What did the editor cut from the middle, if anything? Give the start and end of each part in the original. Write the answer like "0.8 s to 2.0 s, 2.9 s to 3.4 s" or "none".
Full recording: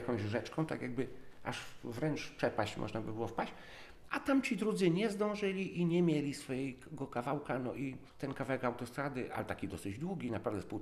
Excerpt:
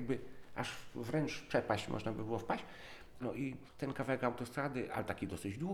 4.1 s to 7.6 s